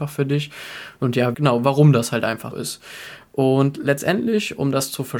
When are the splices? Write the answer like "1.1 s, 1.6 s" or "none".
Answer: 1.3 s, 2.5 s